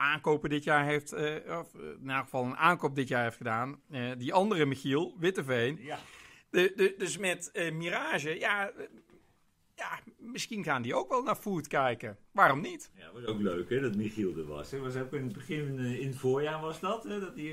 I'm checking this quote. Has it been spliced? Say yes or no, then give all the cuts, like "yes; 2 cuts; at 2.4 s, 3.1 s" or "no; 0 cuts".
no; 0 cuts